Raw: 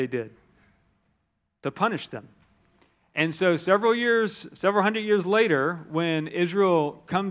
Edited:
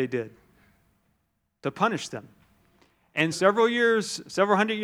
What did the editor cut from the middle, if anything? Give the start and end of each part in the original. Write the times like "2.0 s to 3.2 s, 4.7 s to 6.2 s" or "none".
3.3 s to 3.6 s

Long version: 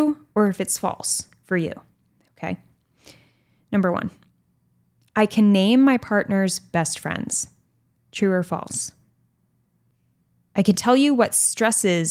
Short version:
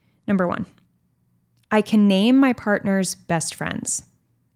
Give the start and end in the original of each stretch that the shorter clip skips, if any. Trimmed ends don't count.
none

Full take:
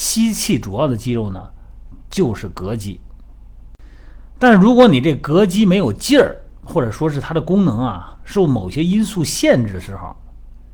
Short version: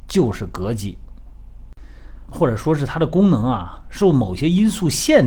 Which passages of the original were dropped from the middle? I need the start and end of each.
4.3 s to 6.6 s

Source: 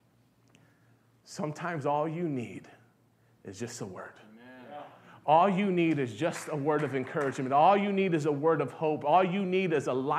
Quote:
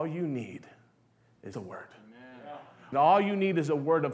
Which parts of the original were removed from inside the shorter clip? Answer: 3.5 s to 3.8 s, 5.2 s to 7.5 s

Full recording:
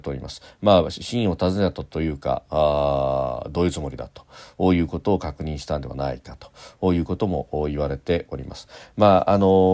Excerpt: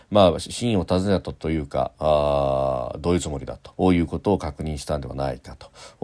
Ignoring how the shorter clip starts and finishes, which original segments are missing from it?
4.2 s to 4.5 s

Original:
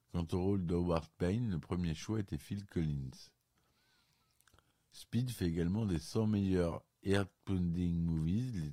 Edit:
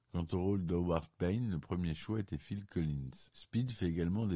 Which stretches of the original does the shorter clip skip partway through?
3.3 s to 4.9 s

